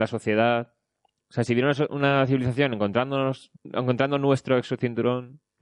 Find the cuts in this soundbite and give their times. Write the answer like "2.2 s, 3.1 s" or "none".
3.6 s